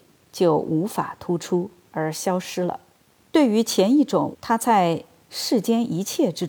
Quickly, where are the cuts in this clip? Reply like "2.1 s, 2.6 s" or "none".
3.2 s, 4.3 s